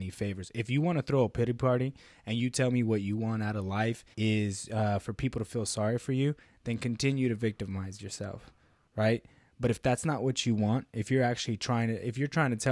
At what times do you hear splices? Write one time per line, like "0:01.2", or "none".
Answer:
0:04.1